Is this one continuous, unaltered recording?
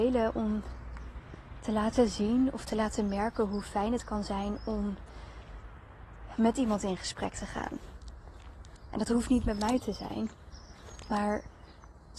yes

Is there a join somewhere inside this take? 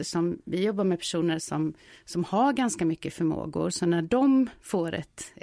no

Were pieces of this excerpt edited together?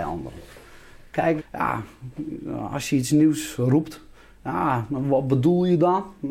yes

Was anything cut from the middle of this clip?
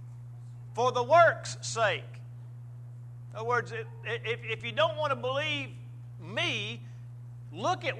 no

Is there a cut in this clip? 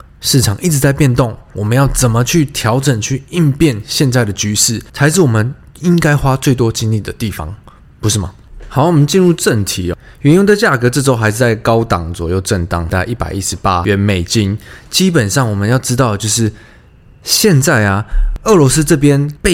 no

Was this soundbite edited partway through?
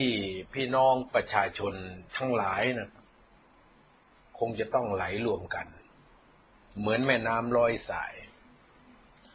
yes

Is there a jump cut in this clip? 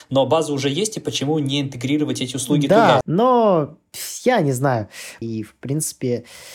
yes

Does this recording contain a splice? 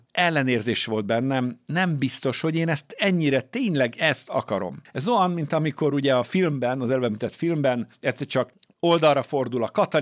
no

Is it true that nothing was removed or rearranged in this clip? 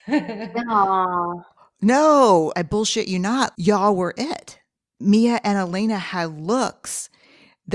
yes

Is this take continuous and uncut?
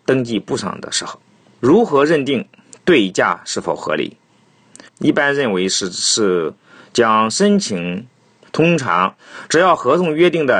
no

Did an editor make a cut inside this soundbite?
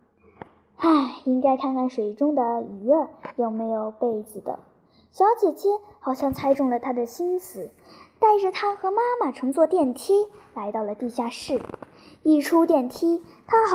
no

